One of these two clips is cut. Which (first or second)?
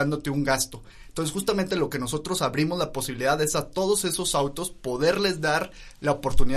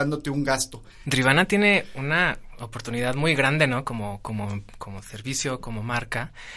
second